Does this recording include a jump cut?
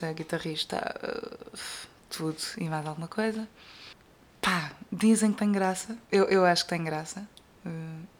yes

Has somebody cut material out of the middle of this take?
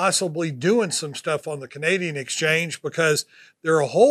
no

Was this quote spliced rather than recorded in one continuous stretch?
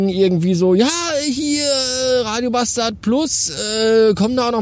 no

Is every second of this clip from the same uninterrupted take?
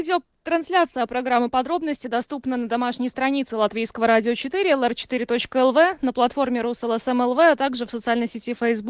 yes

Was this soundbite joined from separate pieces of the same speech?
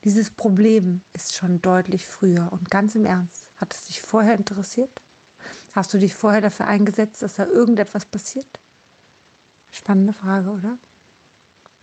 yes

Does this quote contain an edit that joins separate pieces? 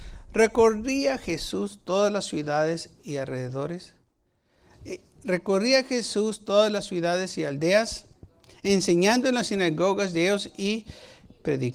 yes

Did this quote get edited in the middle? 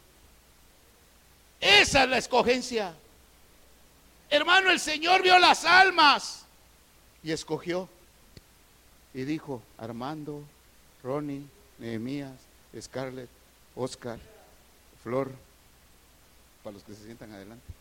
no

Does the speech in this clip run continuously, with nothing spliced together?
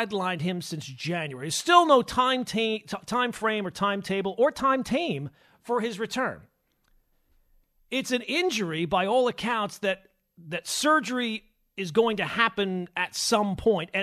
yes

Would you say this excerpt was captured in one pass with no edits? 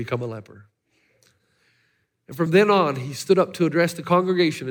yes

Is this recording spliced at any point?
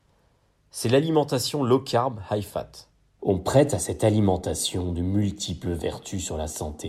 yes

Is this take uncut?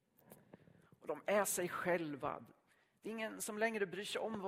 yes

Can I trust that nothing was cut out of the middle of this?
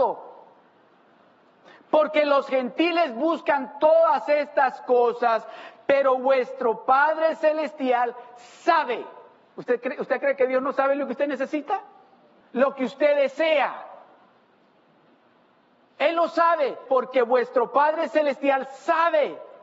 no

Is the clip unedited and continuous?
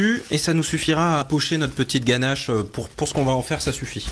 no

